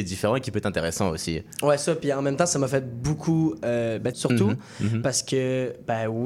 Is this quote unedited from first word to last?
no; 1 cut; at 4.1 s

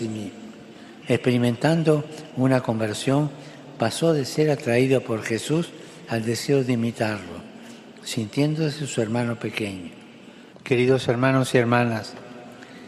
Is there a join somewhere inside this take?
yes; 2 cuts; at 1.0 s, 10.5 s

